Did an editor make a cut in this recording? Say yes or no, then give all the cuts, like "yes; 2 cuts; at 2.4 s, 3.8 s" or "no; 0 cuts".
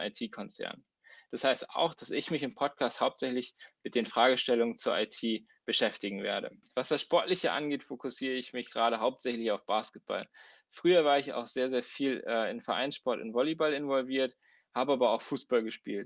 no; 0 cuts